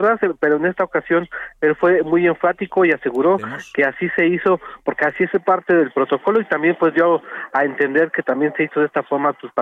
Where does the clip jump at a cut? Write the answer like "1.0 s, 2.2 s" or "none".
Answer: none